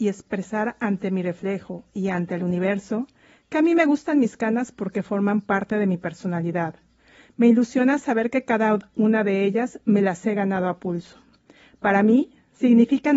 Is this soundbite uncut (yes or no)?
yes